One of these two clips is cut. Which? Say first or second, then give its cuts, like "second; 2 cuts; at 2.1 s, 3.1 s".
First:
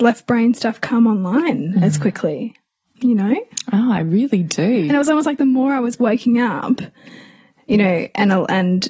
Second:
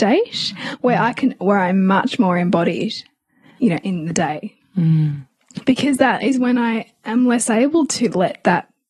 second; 1 cut; at 3.6 s